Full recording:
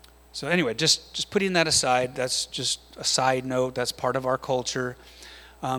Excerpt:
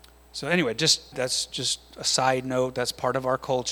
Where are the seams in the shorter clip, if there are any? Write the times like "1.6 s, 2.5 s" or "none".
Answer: 1.1 s

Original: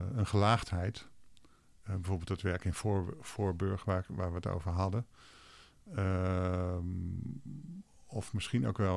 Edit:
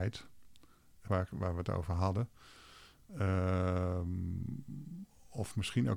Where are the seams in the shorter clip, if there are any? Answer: 1.1 s

